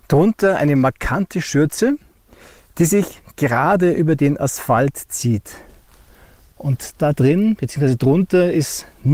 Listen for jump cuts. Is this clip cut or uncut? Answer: uncut